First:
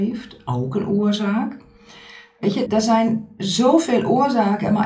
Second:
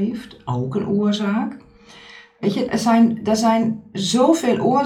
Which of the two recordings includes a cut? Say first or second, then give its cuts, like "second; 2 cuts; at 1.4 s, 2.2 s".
first; 1 cut; at 2.7 s